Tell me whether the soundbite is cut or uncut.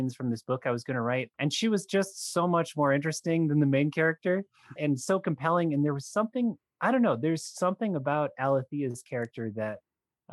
cut